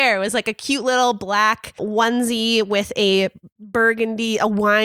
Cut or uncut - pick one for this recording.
cut